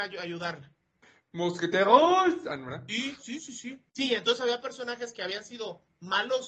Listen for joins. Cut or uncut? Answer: cut